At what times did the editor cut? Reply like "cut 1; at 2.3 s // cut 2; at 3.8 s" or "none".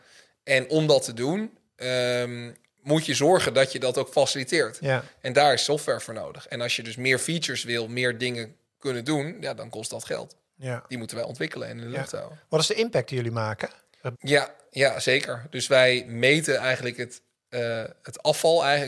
cut 1; at 14.1 s